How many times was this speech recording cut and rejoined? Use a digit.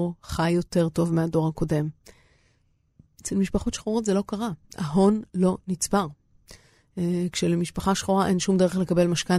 0